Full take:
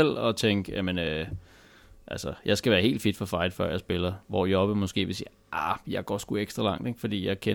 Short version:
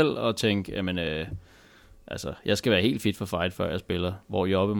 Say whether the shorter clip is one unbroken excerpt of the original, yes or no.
yes